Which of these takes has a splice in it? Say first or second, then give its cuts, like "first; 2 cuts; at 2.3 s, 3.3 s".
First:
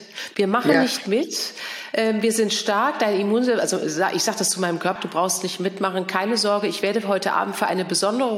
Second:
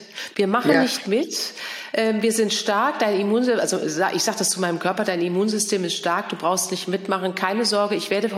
first; 1 cut; at 5.0 s